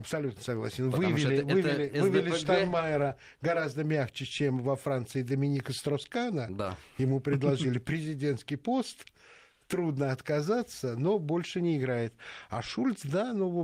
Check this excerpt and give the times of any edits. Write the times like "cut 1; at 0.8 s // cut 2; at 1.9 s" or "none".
none